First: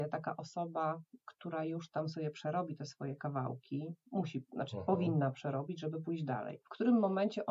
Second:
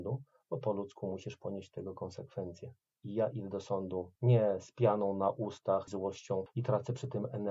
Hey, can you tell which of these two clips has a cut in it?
second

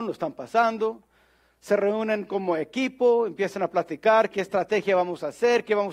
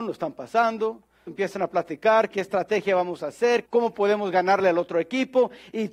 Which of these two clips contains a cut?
second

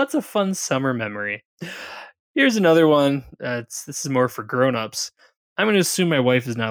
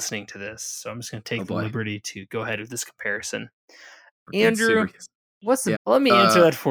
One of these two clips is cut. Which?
second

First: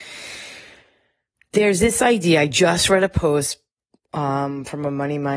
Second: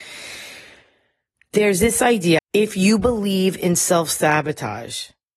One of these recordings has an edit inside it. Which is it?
second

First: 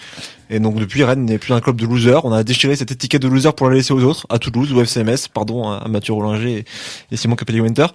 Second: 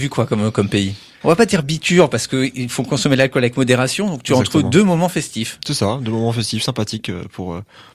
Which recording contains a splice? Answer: second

